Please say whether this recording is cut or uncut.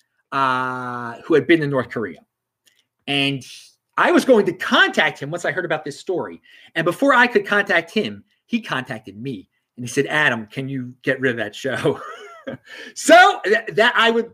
uncut